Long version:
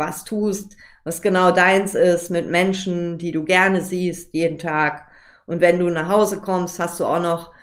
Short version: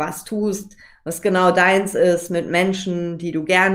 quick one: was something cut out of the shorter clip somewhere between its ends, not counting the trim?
no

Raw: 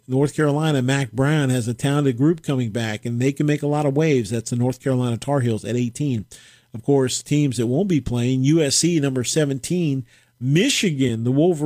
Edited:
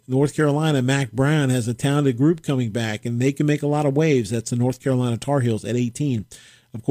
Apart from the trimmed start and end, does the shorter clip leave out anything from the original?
no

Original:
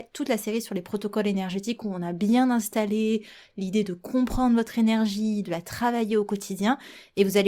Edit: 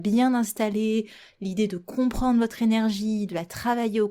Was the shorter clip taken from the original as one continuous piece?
yes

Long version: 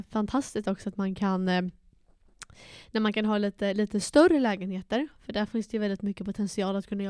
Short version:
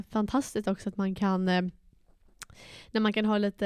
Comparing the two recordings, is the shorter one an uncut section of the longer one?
yes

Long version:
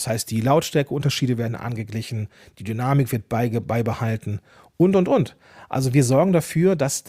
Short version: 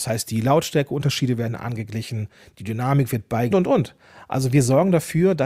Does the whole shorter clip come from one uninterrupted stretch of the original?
no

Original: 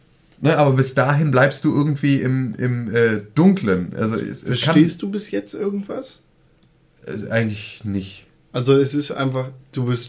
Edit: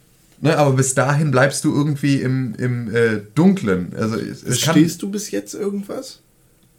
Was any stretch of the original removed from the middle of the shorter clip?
no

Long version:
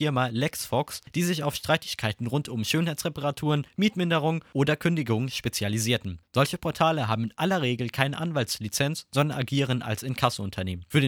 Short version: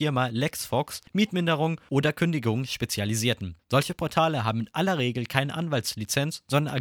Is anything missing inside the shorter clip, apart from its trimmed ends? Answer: yes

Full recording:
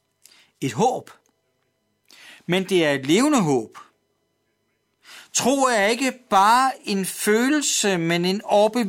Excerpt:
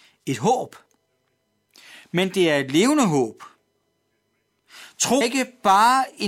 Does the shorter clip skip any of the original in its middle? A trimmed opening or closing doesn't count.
yes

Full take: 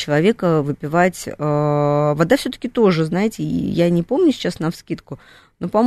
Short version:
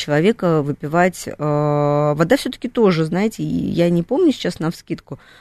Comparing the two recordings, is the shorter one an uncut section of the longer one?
yes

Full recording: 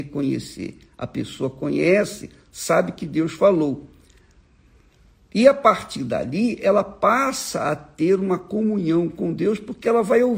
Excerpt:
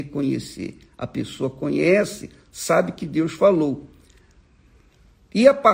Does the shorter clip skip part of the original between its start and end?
no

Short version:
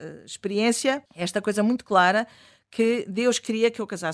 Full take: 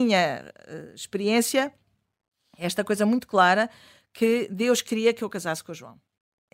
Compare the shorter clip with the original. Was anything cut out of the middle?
yes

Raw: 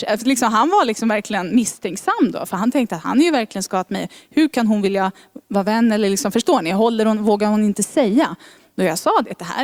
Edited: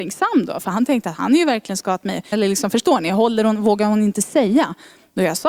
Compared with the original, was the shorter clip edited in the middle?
yes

